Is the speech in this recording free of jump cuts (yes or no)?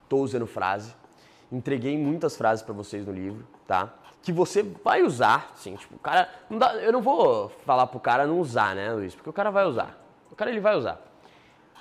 no